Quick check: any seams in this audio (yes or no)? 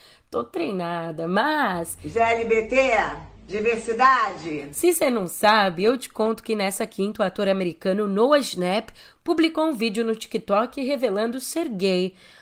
yes